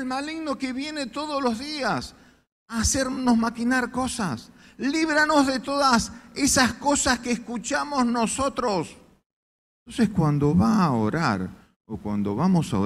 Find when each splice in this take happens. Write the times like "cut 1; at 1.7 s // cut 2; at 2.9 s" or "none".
cut 1; at 9.7 s